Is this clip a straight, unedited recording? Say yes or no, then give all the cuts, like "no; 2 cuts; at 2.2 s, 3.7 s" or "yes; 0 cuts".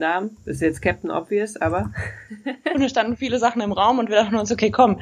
no; 1 cut; at 2.7 s